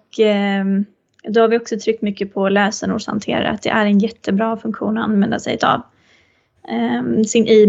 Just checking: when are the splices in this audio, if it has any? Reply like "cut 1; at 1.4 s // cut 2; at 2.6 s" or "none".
cut 1; at 6.6 s